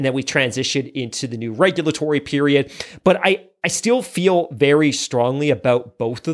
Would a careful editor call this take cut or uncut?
uncut